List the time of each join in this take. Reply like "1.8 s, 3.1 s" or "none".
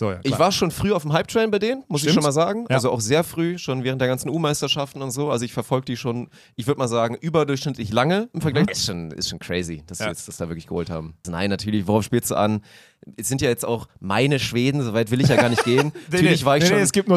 8.7 s, 11.2 s